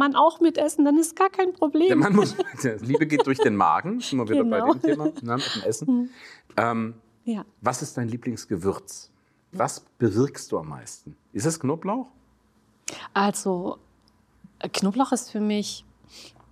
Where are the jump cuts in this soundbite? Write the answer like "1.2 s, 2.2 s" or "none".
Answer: 2.8 s, 9.5 s